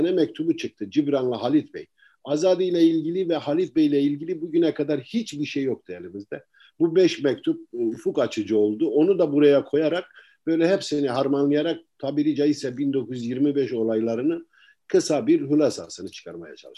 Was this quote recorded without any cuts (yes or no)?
yes